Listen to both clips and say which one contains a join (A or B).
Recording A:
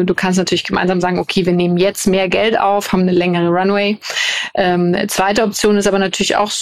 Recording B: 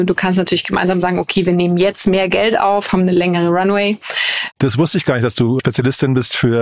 B